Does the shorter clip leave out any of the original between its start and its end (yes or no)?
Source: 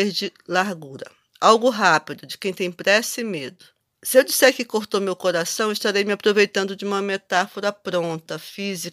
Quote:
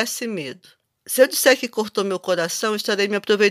no